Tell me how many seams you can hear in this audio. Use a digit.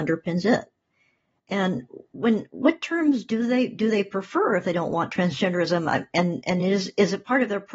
0